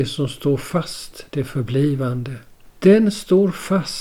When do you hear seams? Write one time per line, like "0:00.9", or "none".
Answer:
0:02.6